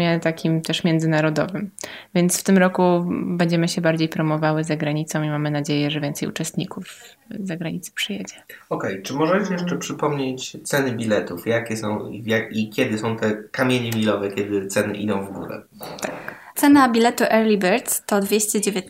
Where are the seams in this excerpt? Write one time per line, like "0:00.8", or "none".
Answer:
0:16.5